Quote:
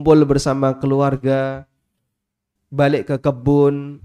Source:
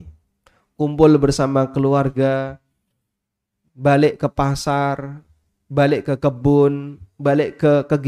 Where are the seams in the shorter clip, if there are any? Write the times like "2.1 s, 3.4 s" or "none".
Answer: 2.6 s